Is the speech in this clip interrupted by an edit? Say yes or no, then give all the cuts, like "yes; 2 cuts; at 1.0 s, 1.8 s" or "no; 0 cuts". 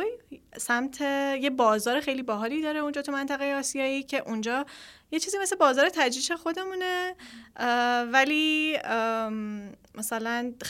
yes; 1 cut; at 2.0 s